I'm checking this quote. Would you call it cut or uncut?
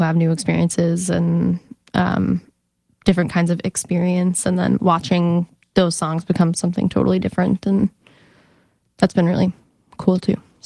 uncut